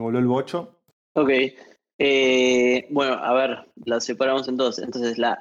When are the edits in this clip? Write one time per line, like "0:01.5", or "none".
0:00.9